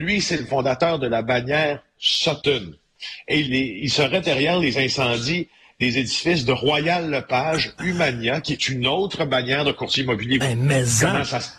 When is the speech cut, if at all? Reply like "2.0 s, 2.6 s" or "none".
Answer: 3.5 s, 10.4 s